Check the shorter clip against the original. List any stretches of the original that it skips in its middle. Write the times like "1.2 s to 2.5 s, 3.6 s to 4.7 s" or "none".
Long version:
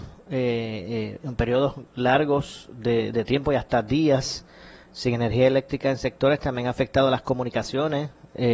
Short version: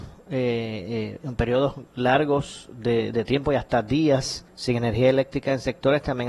4.5 s to 4.9 s